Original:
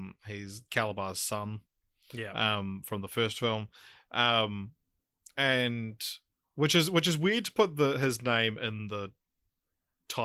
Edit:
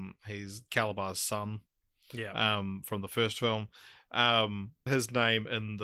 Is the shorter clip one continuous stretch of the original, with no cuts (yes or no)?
no